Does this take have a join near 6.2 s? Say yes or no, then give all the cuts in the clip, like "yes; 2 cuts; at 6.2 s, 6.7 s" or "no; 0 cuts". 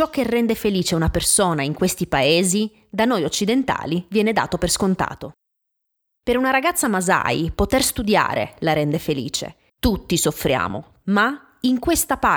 no; 2 cuts; at 9.7 s, 11.0 s